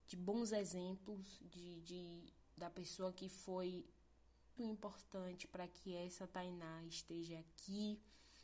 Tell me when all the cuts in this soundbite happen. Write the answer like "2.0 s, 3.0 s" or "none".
4.6 s